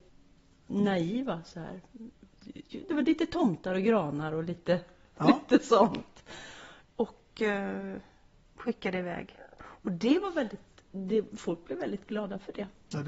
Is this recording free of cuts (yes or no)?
no